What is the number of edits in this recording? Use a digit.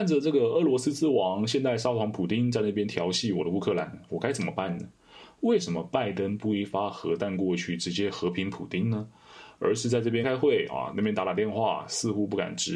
1